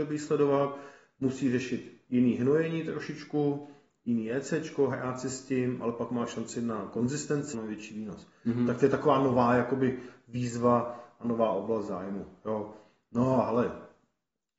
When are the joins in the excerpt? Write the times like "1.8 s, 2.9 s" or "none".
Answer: 7.5 s